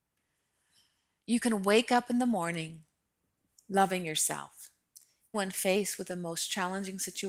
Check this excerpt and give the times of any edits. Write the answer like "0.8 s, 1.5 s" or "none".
5.3 s